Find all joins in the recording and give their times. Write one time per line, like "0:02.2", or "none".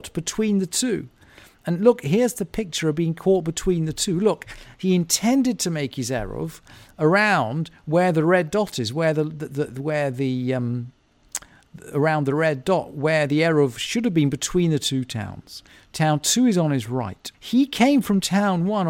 0:09.7
0:17.3